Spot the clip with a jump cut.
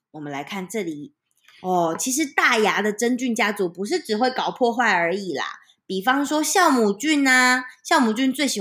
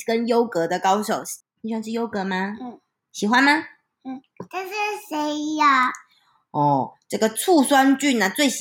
second; 1 cut; at 1.4 s

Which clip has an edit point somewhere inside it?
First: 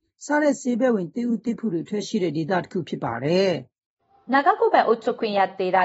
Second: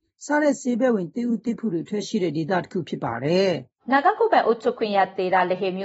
second; 1 cut; at 3.8 s

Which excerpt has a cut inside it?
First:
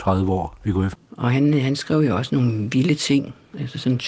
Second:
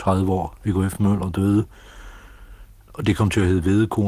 first; 1 cut; at 0.9 s

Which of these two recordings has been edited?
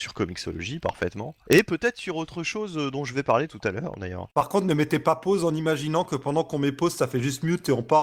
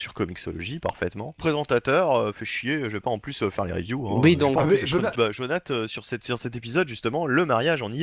second; 2 cuts; at 1.4 s, 5.1 s

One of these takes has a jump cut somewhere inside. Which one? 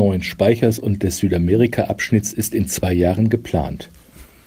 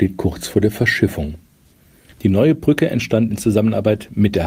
second; 1 cut; at 2.1 s

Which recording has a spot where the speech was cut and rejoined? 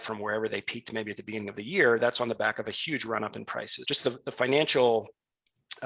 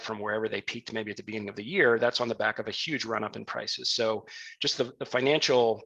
first; 1 cut; at 3.8 s

